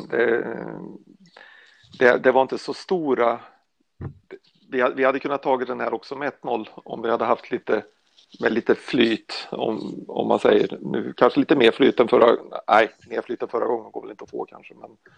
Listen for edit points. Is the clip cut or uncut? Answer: uncut